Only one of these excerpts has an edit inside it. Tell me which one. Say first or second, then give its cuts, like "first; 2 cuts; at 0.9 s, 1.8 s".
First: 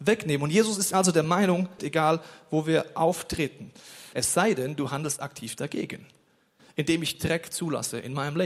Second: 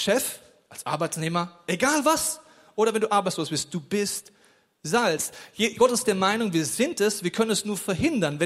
first; 2 cuts; at 1.8 s, 4.1 s